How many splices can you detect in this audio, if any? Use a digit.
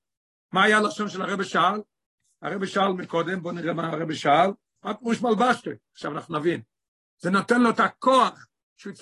1